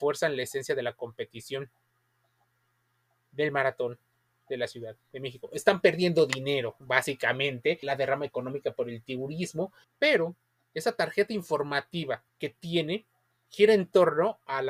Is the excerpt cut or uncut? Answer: cut